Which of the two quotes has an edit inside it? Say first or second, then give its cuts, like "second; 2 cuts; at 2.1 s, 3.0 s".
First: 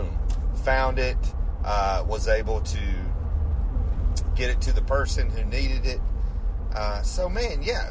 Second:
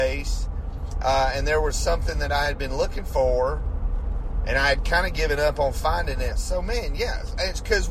second; 1 cut; at 6.3 s